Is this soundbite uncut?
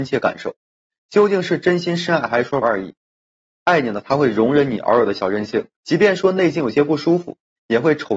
no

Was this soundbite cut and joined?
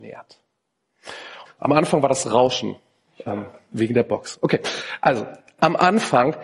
yes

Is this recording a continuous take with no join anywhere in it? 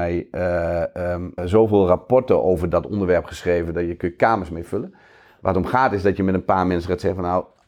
no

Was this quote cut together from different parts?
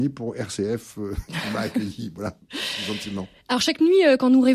no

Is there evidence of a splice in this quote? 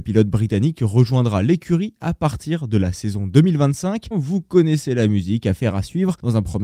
yes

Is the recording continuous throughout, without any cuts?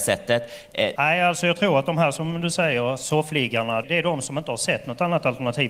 no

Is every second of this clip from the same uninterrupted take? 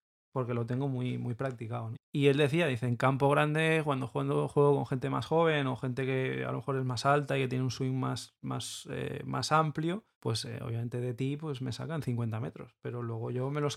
no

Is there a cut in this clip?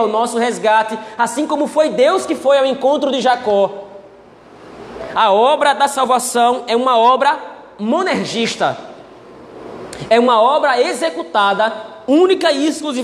no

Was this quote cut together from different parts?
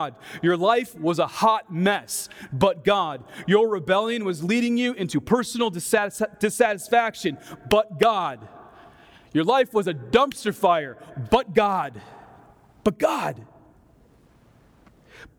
no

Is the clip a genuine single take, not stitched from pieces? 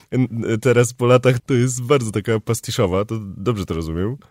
no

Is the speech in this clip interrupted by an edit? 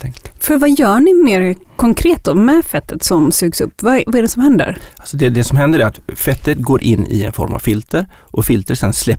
no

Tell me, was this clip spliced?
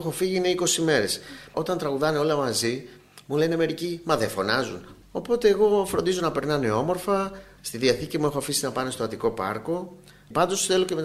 yes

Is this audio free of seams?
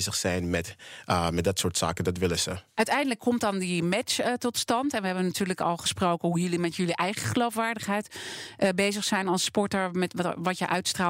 no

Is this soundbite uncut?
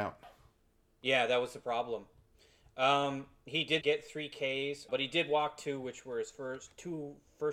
no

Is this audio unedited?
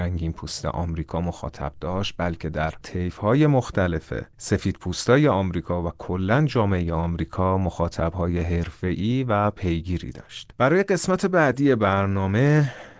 yes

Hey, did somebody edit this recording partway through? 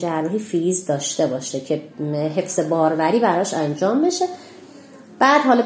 no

